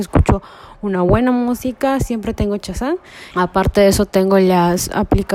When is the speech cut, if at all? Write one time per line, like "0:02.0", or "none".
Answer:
0:03.3